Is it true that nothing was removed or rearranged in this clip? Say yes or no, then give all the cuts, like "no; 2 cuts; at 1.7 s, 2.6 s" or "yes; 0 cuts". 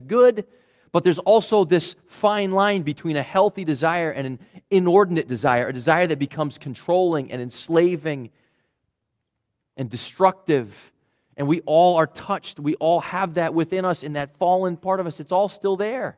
yes; 0 cuts